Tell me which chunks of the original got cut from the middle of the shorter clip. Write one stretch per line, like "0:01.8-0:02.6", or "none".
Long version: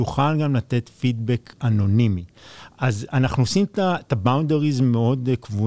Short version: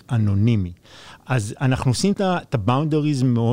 0:03.7-0:03.7